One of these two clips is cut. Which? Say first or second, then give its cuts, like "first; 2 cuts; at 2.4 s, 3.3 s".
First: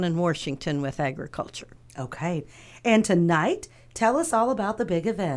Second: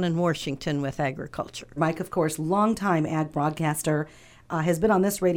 second; 1 cut; at 1.8 s